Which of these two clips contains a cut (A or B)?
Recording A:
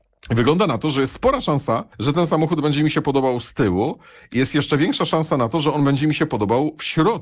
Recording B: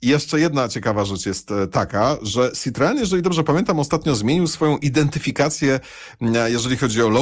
A